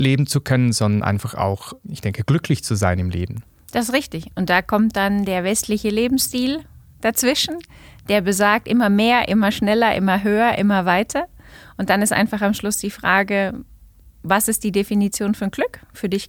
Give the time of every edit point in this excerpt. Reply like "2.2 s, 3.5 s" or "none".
none